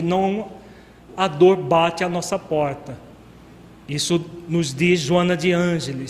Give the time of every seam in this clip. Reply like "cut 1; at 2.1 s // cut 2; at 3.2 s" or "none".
cut 1; at 1.1 s